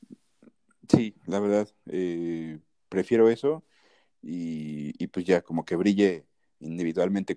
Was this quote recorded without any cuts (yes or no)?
yes